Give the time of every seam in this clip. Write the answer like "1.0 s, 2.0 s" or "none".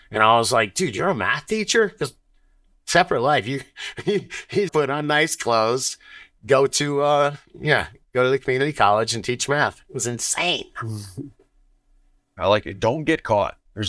4.7 s, 12.4 s